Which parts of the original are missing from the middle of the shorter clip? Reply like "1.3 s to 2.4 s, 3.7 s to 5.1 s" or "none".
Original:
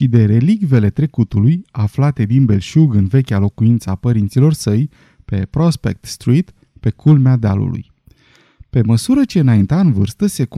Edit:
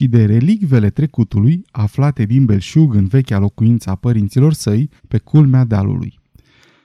5.0 s to 6.7 s